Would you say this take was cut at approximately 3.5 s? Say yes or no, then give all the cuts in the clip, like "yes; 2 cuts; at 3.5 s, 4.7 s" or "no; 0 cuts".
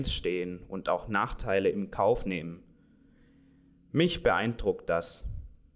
no; 0 cuts